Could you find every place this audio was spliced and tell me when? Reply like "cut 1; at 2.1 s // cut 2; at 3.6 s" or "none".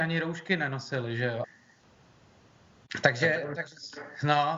cut 1; at 1.4 s

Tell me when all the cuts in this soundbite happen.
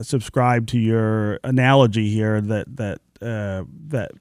none

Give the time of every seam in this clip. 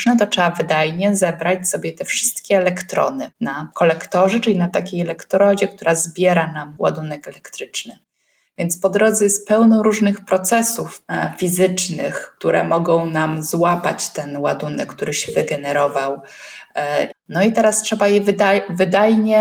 cut 1; at 17.1 s

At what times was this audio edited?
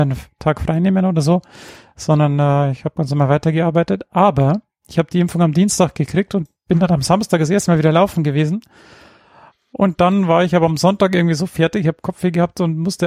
none

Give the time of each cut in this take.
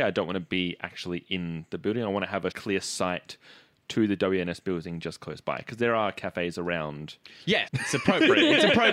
cut 1; at 2.5 s // cut 2; at 7.7 s

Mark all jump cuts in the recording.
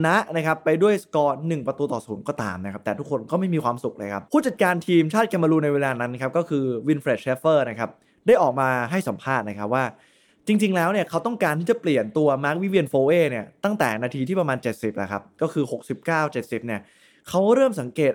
cut 1; at 4.3 s

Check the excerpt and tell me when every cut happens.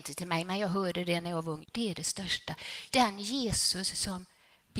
cut 1; at 1.6 s // cut 2; at 2.9 s

